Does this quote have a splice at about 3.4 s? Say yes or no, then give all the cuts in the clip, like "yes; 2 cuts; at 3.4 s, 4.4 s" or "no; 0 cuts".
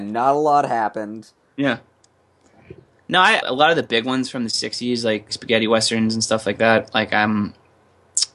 yes; 2 cuts; at 3.4 s, 5.3 s